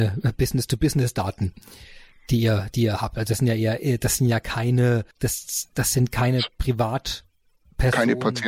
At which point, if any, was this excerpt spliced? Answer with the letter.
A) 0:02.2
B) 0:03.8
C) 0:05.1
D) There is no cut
C